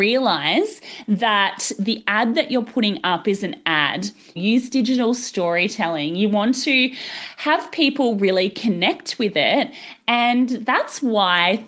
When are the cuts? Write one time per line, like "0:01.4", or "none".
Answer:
0:04.4